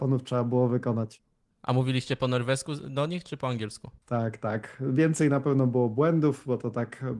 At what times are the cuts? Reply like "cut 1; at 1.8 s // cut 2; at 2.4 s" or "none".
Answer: cut 1; at 4.0 s